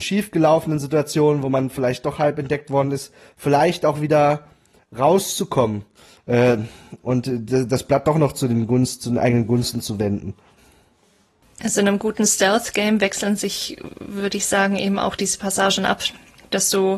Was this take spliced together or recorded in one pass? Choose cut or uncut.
uncut